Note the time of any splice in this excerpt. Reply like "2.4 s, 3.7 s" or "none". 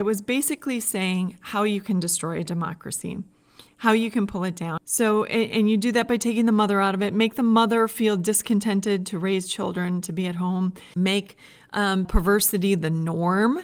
4.8 s, 10.9 s, 12.0 s